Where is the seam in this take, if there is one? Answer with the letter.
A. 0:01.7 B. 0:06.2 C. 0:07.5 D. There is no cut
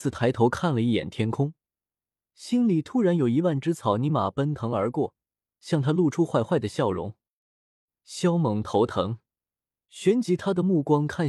D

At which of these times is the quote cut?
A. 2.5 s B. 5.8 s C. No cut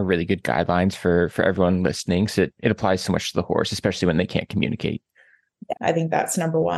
B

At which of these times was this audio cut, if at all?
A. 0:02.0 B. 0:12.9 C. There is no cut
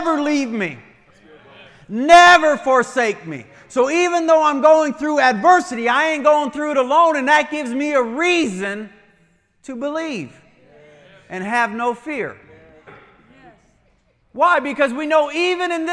B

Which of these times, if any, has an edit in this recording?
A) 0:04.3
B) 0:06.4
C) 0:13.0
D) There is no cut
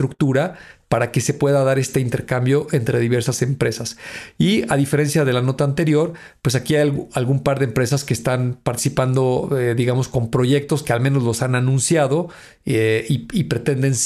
D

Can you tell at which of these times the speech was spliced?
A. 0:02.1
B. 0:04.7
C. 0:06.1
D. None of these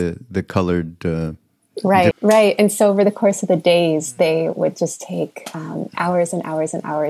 A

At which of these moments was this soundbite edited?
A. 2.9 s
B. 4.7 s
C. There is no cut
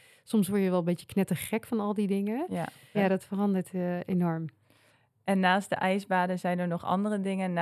A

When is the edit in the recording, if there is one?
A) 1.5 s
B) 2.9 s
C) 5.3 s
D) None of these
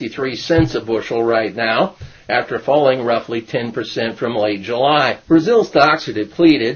C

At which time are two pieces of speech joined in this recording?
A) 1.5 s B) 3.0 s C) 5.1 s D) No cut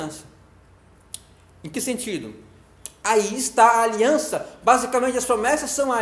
B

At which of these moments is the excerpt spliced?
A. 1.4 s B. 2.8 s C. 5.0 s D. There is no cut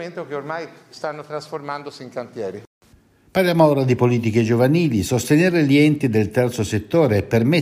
D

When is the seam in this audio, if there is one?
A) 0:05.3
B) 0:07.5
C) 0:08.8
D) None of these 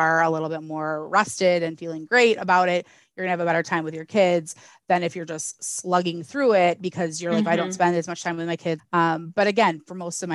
C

